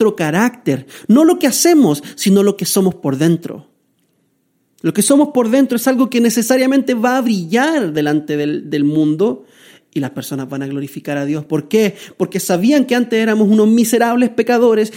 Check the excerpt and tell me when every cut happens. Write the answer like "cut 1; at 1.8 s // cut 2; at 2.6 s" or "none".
none